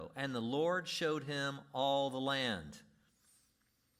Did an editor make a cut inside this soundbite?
no; 0 cuts

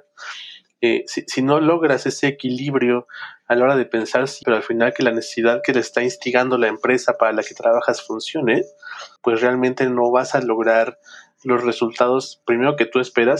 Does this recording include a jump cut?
yes; 2 cuts; at 4.4 s, 9.2 s

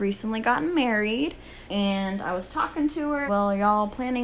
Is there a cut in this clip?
yes; 2 cuts; at 1.7 s, 3.3 s

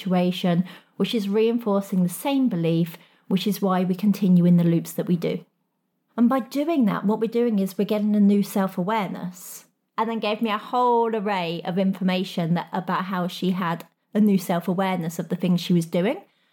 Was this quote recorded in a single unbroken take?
no; 2 cuts; at 6.1 s, 9.9 s

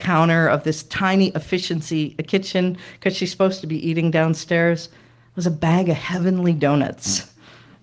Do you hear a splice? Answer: no; 0 cuts

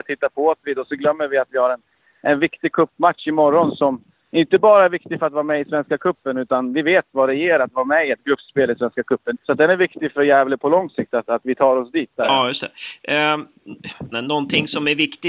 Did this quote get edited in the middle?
yes; 3 cuts; at 9.3 s, 12.2 s, 14.1 s

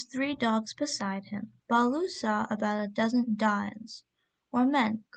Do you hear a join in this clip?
yes; 1 cut; at 1.6 s

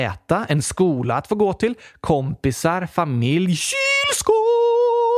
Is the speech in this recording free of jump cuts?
yes; 0 cuts

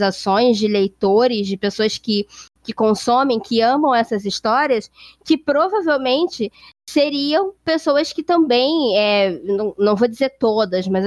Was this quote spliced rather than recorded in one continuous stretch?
no; 0 cuts

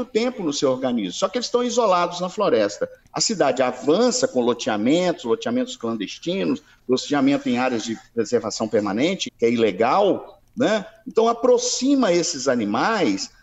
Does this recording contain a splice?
yes; 1 cut; at 9.3 s

